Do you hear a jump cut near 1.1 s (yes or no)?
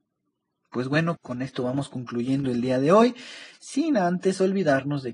yes